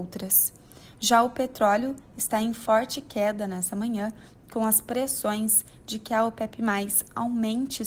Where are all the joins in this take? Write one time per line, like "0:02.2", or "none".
none